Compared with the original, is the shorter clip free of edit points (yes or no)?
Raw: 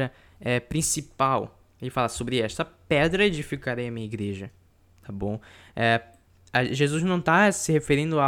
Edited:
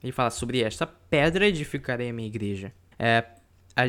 no